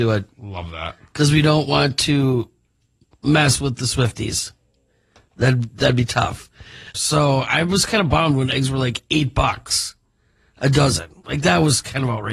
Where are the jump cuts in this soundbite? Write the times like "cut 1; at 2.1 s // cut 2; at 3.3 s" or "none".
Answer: cut 1; at 6.9 s